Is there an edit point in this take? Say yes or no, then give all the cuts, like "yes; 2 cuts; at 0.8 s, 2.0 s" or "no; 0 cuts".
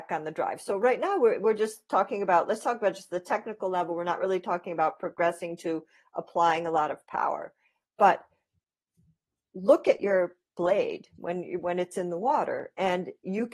no; 0 cuts